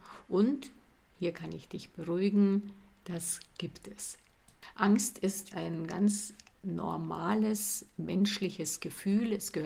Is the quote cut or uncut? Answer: cut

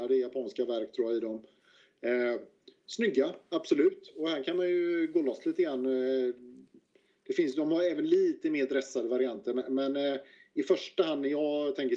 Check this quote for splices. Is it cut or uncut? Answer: uncut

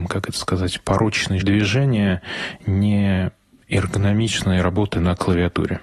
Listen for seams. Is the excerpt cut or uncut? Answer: cut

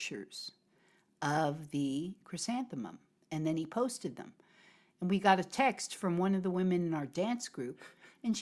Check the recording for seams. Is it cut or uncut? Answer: uncut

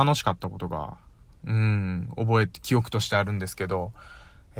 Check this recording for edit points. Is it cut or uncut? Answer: uncut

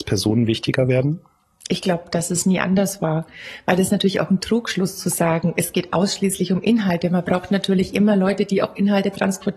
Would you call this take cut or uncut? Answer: uncut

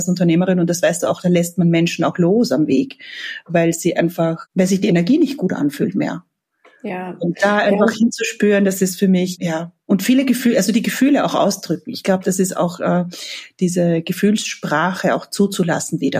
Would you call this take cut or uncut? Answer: uncut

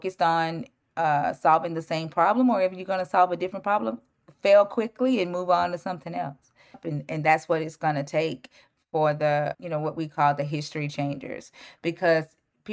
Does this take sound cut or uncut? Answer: cut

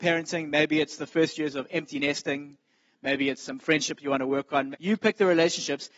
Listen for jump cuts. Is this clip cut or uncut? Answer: cut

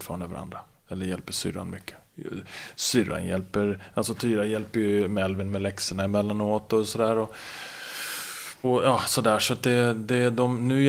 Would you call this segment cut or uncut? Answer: cut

